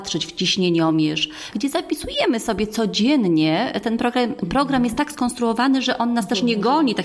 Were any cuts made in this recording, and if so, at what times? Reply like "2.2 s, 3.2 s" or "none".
1.5 s